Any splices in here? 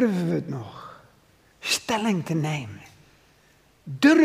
no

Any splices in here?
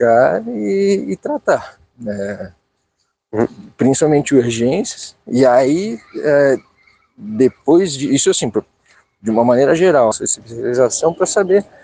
yes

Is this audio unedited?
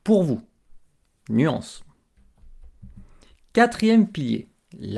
yes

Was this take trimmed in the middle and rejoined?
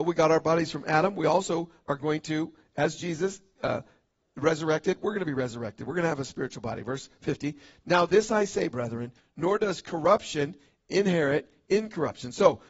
yes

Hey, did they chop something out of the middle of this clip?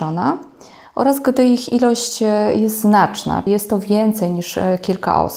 yes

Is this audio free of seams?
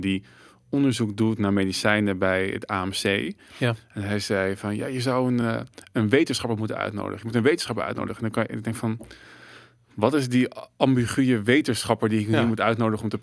yes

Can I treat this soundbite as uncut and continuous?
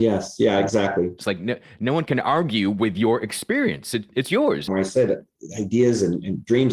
no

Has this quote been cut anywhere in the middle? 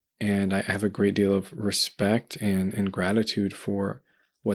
no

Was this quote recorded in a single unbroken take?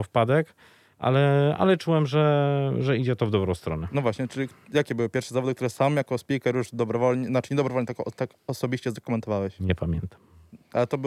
yes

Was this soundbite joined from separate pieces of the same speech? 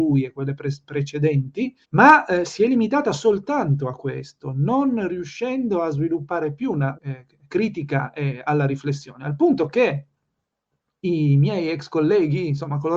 yes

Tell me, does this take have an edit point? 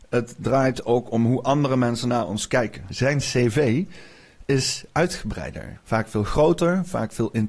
yes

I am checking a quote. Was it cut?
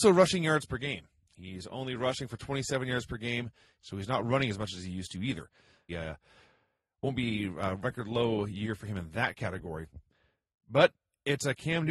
yes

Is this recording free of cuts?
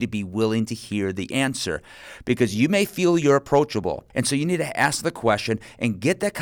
no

